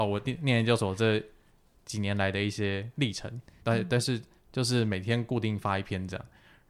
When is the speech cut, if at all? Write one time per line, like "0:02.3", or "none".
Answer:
0:03.6